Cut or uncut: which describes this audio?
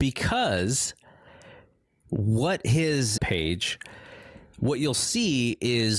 cut